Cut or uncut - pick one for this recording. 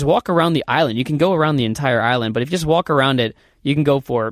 uncut